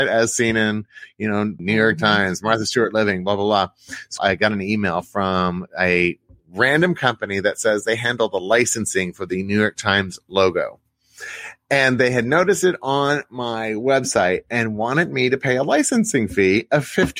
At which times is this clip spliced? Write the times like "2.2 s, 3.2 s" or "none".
1.6 s, 4.2 s